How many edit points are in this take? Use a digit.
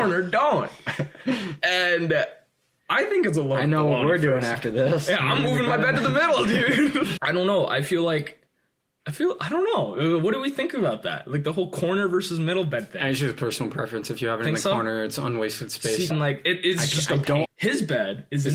3